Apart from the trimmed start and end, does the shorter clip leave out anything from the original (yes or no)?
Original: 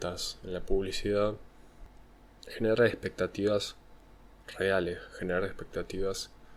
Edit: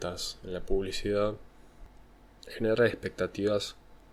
no